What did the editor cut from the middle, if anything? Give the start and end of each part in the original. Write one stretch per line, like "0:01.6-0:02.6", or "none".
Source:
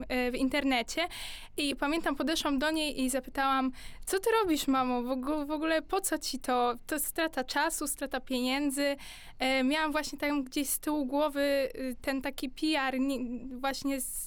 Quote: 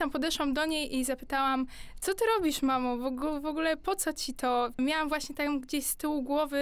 0:06.8-0:09.6